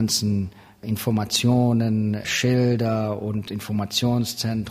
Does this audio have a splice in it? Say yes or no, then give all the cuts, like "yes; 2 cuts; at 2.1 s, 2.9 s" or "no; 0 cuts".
no; 0 cuts